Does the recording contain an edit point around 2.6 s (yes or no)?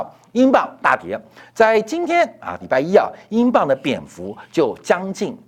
yes